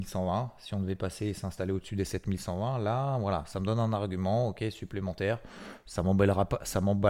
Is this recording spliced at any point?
no; 0 cuts

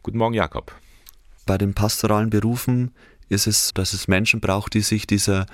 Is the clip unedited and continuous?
no; 2 cuts; at 1.4 s, 3.7 s

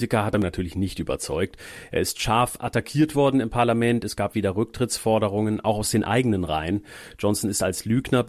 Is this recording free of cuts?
yes; 0 cuts

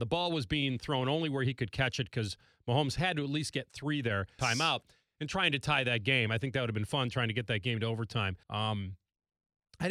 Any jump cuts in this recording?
yes; 2 cuts; at 4.4 s, 8.4 s

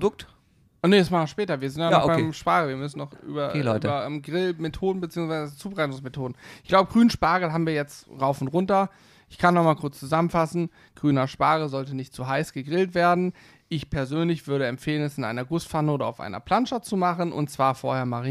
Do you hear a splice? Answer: no; 0 cuts

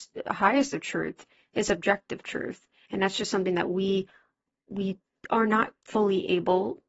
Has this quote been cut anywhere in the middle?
no; 0 cuts

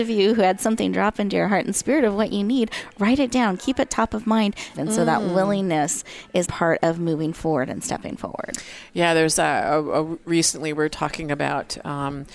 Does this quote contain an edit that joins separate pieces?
yes; 2 cuts; at 4.7 s, 6.4 s

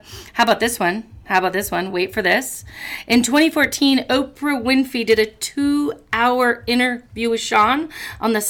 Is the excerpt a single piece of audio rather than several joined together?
yes; 0 cuts

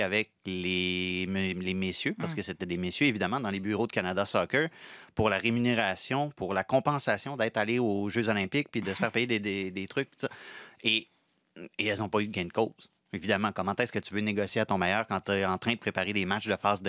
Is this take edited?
no; 0 cuts

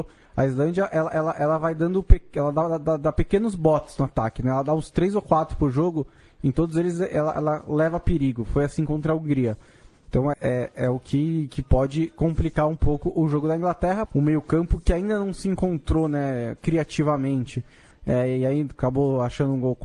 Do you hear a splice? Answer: yes; 3 cuts; at 10.3 s, 14.1 s, 17.9 s

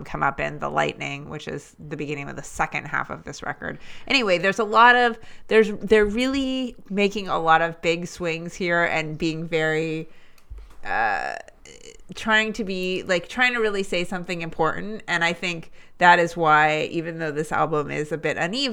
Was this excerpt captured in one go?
yes; 0 cuts

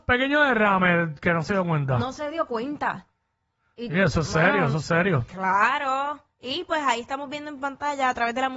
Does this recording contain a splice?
no; 0 cuts

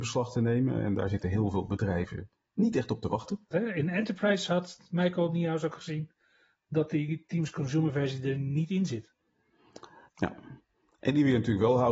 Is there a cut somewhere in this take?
yes; 2 cuts; at 3.5 s, 10.1 s

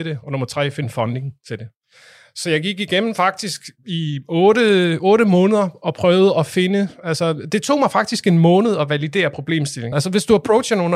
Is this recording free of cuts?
no; 1 cut; at 9.9 s

